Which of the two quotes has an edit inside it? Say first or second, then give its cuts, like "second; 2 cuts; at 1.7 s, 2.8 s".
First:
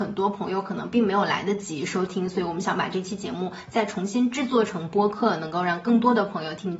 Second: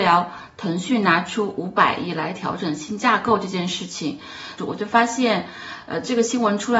second; 1 cut; at 4.6 s